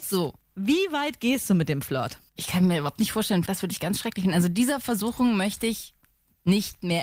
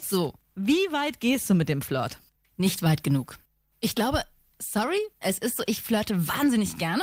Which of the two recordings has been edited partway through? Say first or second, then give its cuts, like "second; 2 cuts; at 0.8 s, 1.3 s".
first; 2 cuts; at 2.4 s, 3.4 s